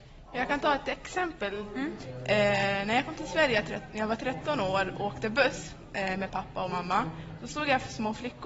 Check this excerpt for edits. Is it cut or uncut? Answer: cut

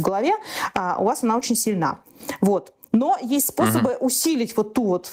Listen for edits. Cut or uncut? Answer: uncut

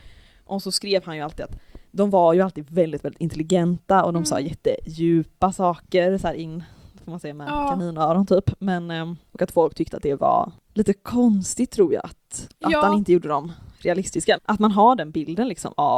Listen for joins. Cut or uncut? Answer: cut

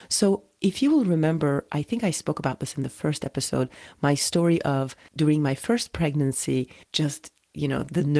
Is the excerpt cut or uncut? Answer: cut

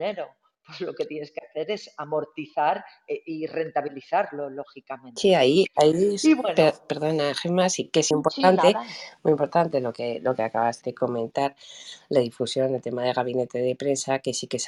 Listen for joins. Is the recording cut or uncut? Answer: cut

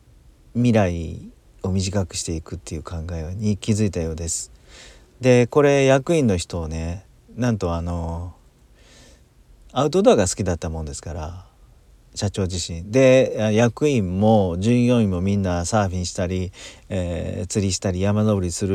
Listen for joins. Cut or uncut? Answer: uncut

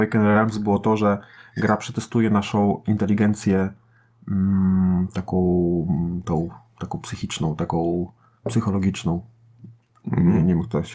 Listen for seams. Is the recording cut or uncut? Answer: uncut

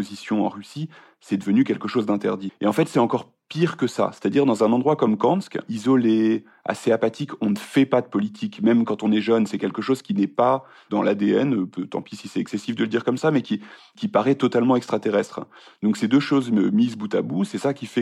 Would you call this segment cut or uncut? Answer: uncut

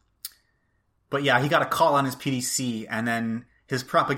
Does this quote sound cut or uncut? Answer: uncut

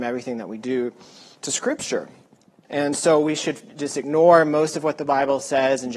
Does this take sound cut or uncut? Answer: cut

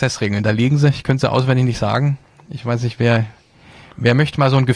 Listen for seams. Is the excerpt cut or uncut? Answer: uncut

